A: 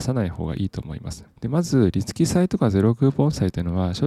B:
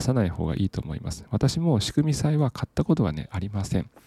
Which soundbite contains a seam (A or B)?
A